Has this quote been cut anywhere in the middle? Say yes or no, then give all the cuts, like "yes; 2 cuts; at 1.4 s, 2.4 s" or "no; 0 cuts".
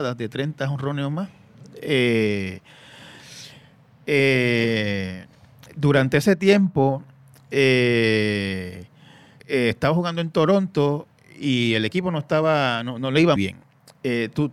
yes; 2 cuts; at 9.4 s, 13.4 s